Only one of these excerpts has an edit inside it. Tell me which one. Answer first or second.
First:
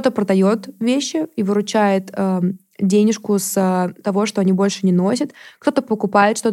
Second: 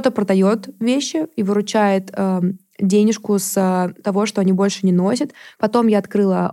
second